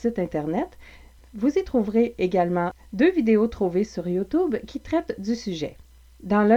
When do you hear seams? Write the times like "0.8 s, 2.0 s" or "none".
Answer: none